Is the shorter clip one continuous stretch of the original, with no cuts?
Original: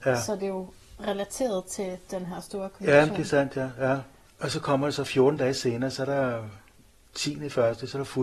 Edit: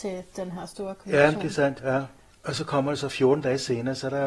no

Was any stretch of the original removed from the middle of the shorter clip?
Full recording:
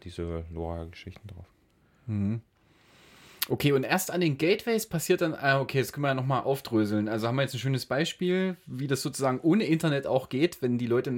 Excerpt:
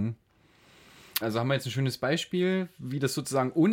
yes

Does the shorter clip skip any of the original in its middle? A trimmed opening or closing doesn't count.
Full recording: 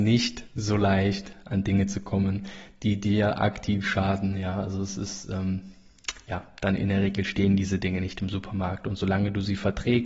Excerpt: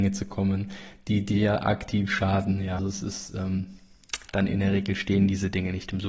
yes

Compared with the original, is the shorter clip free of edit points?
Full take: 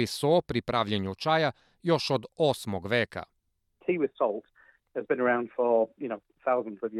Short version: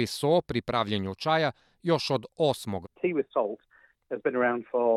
no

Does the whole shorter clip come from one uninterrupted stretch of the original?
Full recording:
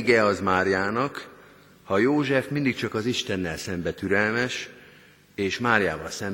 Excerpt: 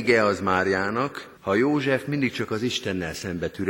no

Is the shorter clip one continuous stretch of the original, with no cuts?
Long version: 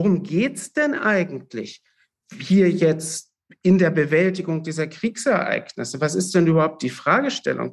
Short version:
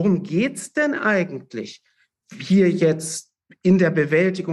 yes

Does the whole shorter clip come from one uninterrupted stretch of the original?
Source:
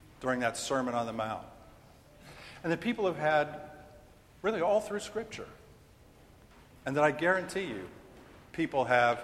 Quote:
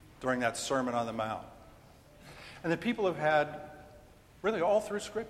yes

